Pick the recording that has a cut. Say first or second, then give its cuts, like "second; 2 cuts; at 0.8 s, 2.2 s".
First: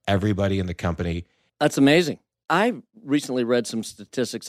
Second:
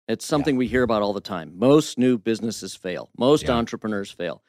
first; 1 cut; at 1.5 s